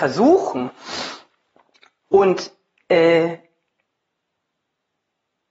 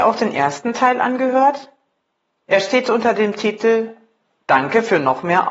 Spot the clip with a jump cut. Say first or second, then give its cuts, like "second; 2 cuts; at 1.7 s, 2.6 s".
first; 1 cut; at 2.0 s